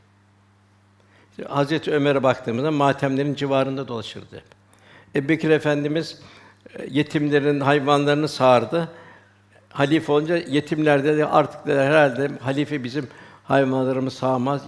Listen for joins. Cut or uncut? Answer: uncut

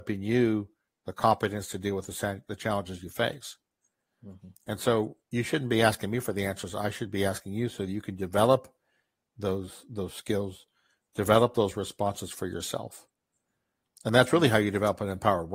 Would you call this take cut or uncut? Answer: uncut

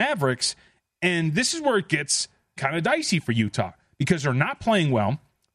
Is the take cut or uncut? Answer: cut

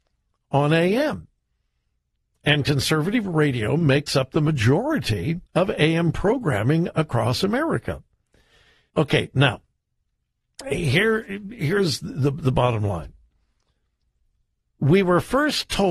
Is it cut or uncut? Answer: cut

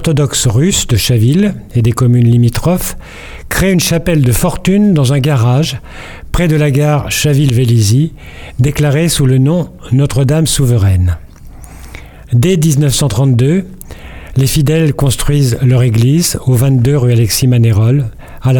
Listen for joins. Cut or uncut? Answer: uncut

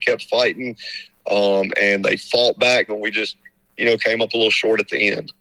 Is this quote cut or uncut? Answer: cut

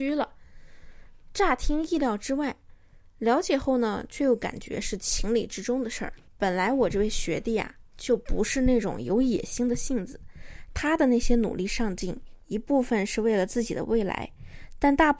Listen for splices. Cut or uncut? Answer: uncut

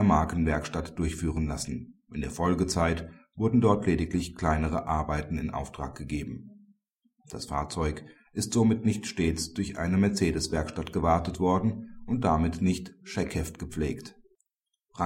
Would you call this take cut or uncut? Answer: cut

